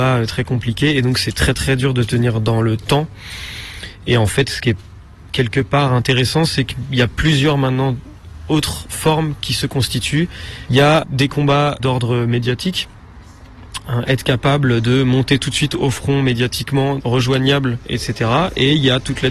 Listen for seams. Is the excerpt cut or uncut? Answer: cut